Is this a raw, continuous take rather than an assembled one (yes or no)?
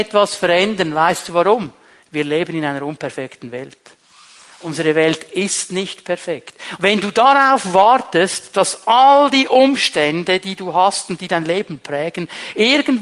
no